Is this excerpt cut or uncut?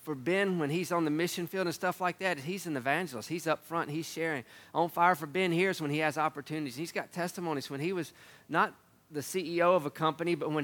uncut